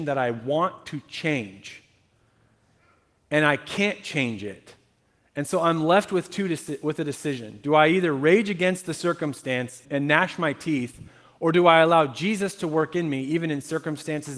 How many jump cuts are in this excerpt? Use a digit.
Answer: 1